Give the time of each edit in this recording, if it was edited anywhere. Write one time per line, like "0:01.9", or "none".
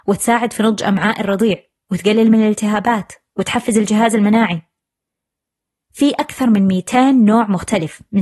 none